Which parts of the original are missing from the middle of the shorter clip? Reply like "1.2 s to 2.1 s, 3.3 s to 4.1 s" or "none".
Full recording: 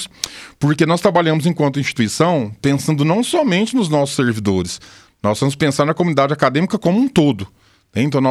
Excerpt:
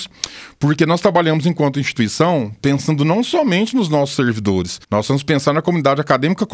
4.8 s to 5.2 s